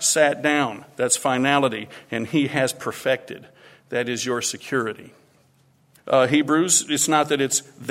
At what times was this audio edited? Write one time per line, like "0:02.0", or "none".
0:06.0